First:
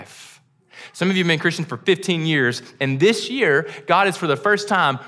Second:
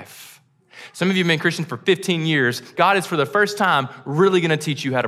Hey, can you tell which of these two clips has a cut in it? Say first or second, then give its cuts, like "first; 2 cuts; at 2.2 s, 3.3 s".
second; 1 cut; at 2.7 s